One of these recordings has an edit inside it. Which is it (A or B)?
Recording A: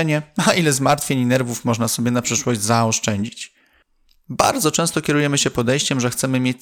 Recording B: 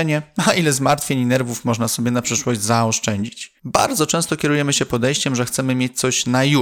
B